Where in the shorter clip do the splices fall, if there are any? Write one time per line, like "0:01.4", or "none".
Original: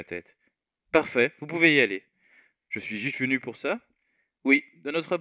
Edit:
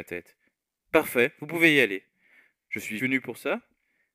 0:03.0